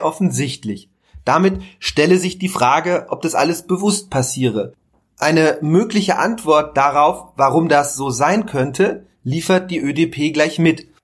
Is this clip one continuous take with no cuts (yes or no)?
yes